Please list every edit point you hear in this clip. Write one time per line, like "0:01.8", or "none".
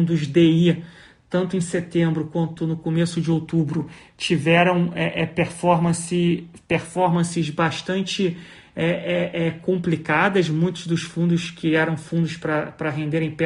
none

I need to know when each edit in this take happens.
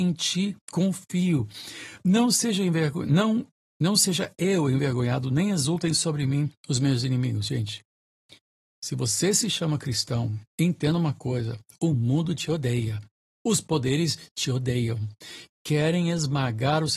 0:10.5

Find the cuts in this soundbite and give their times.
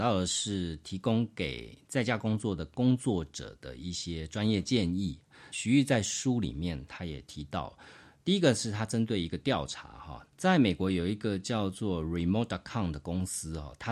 0:05.5
0:10.3

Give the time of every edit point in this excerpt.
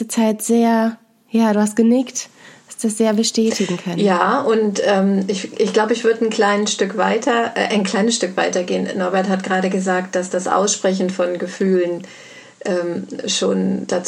none

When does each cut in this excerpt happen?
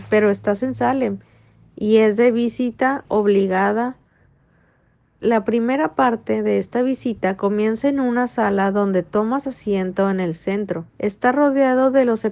0:05.2
0:10.9

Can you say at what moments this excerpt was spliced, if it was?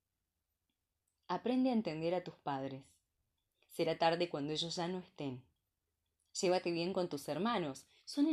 none

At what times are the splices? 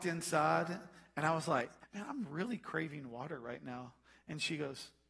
0:01.8

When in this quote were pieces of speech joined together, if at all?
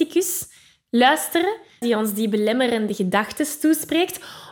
0:01.8

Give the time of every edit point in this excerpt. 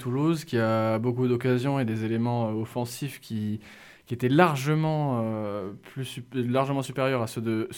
none

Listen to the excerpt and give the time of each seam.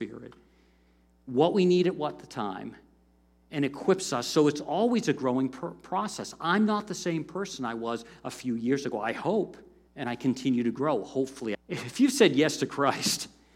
0:09.9
0:11.5

